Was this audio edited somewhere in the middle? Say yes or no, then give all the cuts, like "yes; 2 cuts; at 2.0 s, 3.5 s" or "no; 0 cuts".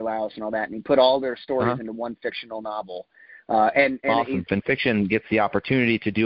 yes; 1 cut; at 4.5 s